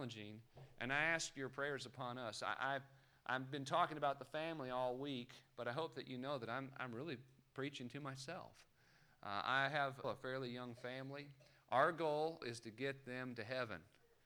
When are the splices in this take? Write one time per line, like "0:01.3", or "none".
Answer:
0:10.0
0:12.4

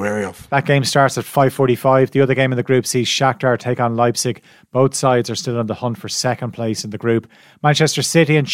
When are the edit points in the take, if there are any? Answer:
none

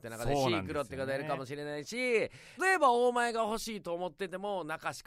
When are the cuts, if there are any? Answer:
0:02.6

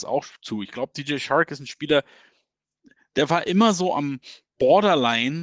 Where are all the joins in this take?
none

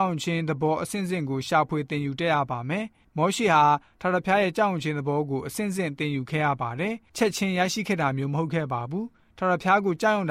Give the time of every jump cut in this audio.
none

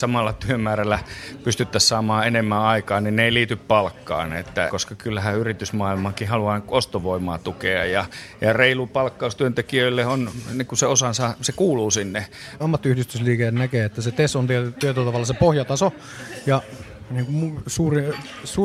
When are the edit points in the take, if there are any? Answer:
0:04.7
0:12.6

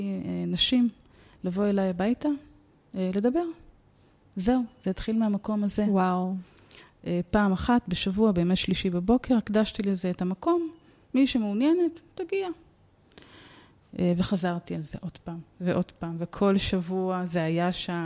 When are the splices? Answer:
none

